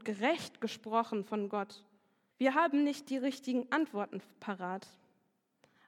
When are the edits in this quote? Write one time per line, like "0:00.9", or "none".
0:02.3